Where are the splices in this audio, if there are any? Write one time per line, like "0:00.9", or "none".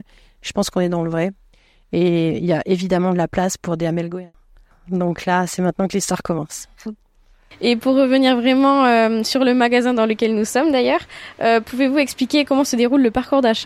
none